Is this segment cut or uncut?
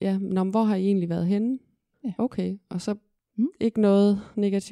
cut